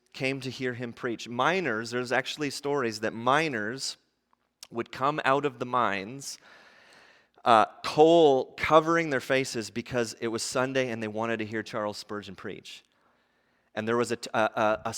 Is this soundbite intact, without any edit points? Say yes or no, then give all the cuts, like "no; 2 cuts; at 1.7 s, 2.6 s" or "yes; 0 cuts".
yes; 0 cuts